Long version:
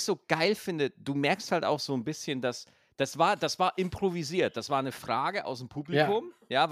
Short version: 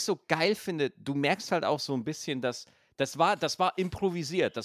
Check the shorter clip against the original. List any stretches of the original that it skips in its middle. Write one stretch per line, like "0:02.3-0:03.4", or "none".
none